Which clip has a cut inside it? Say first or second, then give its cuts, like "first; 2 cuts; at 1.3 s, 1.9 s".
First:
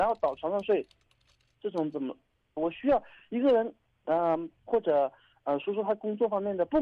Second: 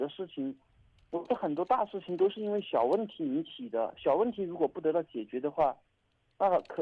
first; 2 cuts; at 2.6 s, 4.7 s